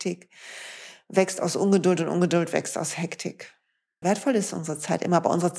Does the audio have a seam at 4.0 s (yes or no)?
yes